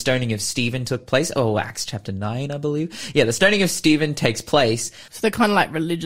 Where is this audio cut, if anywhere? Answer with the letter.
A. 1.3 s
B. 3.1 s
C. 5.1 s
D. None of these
C